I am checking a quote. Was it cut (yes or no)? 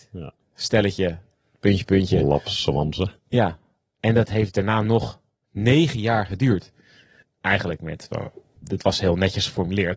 yes